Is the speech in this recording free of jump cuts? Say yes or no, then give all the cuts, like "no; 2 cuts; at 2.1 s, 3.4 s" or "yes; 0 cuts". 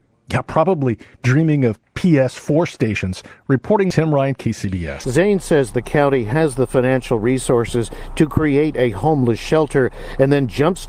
no; 1 cut; at 5.0 s